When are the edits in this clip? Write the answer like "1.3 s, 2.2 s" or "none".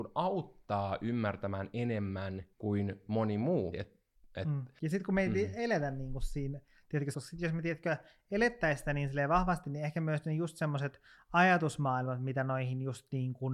2.5 s, 3.7 s, 7.1 s